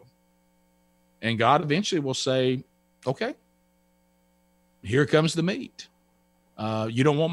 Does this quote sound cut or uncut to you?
uncut